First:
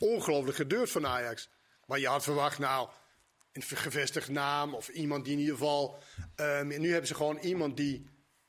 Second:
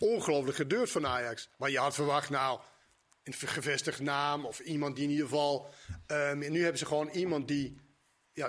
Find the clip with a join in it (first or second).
second